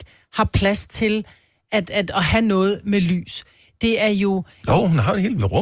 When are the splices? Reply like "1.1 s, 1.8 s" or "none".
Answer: none